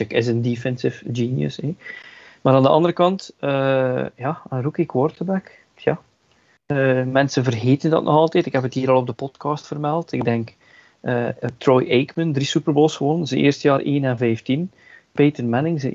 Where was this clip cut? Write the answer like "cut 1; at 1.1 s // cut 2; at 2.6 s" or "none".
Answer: none

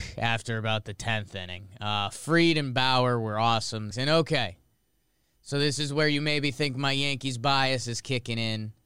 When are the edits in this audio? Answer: cut 1; at 3.9 s

